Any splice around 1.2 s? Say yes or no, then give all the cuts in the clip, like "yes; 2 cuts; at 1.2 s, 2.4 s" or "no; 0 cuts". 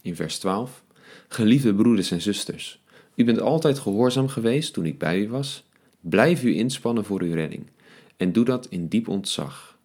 no; 1 cut; at 5.9 s